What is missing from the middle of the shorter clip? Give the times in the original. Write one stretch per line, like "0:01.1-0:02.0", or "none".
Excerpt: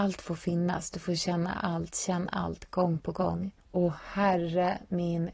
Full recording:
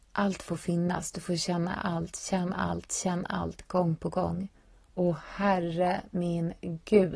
0:02.1-0:02.9
0:04.6-0:04.8